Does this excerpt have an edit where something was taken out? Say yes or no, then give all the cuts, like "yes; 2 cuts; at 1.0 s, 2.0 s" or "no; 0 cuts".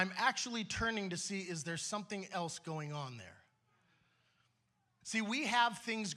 yes; 1 cut; at 5.0 s